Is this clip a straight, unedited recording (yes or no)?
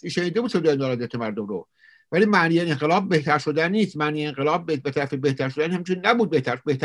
yes